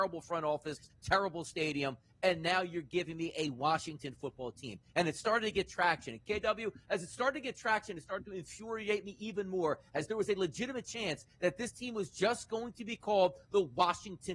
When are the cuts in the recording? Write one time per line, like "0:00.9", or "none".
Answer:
none